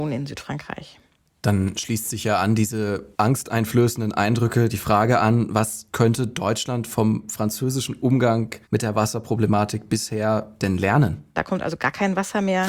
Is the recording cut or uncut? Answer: cut